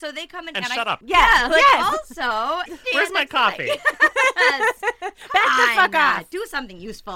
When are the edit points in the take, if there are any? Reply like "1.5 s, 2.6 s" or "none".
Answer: 1.0 s, 2.7 s